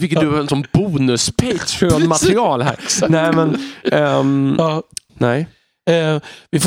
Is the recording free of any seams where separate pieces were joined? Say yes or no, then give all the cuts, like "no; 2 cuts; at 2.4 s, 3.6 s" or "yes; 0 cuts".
no; 1 cut; at 5.1 s